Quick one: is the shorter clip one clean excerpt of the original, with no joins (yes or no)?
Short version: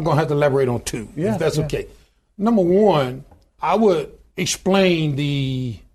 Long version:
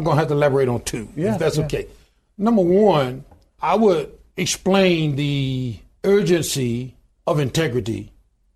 yes